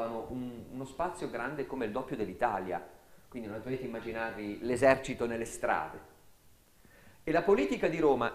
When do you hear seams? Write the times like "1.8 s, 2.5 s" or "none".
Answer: 7.1 s